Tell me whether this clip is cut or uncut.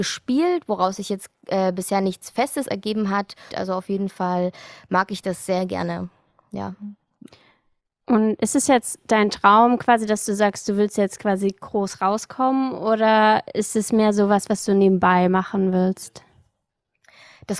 cut